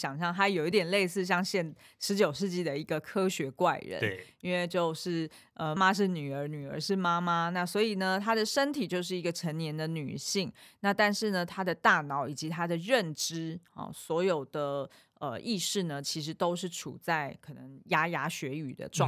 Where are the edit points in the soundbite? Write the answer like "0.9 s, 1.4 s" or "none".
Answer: 5.8 s